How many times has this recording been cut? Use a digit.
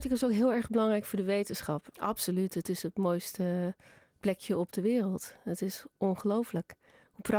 1